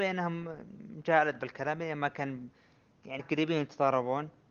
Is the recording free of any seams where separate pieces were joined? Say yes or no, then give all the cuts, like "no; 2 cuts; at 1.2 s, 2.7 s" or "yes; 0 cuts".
no; 1 cut; at 3.2 s